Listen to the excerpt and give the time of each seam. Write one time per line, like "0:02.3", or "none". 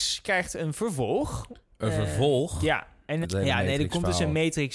0:03.2